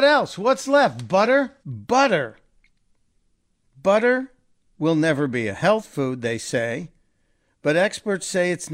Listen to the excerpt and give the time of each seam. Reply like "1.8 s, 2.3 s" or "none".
1.6 s